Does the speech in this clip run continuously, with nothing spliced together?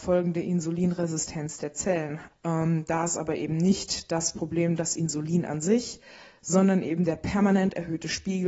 no; 1 cut; at 2.3 s

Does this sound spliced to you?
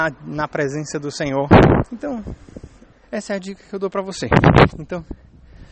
yes; 3 cuts; at 1.9 s, 2.9 s, 4.7 s

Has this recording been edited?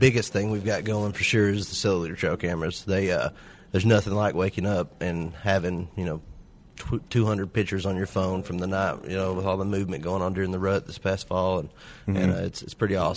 no; 0 cuts

